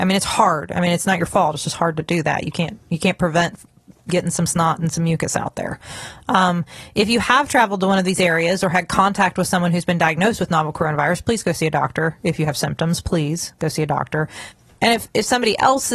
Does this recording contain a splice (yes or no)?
no